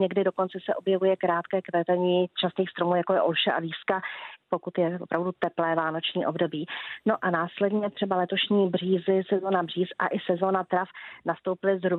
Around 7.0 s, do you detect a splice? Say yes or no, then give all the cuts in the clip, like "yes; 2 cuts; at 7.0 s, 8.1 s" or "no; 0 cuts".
no; 1 cut; at 4.4 s